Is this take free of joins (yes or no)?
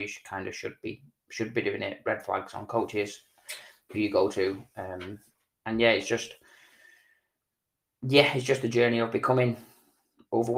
yes